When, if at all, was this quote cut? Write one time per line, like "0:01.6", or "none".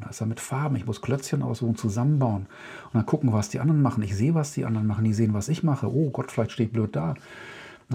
none